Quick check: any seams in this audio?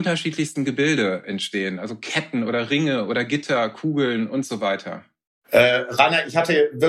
no; 0 cuts

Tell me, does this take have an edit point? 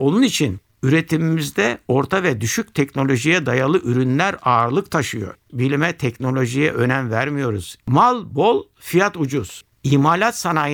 yes; 3 cuts; at 5.5 s, 7.8 s, 9.7 s

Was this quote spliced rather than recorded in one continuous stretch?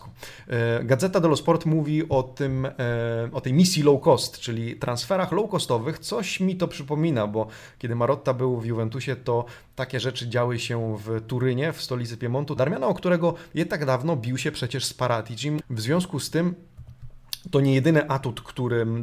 yes; 2 cuts; at 12.6 s, 15.6 s

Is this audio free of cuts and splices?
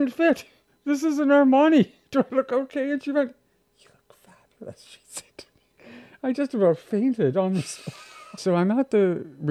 no; 1 cut; at 8.4 s

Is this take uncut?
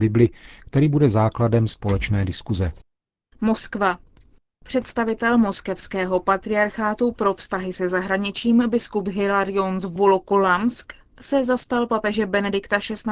yes; 0 cuts

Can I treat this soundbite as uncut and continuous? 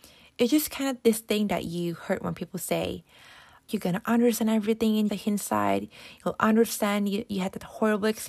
no; 2 cuts; at 3.7 s, 5.1 s

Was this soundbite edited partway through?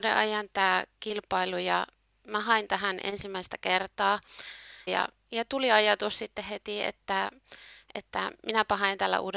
yes; 1 cut; at 4.9 s

